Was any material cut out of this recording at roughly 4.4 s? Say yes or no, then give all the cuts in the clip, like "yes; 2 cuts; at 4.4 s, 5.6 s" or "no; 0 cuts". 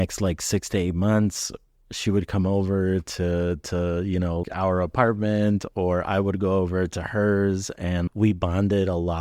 yes; 2 cuts; at 4.4 s, 8.1 s